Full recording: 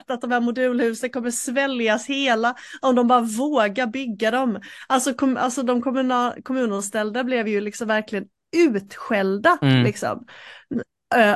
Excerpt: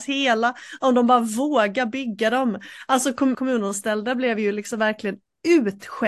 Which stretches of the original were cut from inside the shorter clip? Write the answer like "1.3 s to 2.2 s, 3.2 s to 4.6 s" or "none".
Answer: 5.4 s to 6.4 s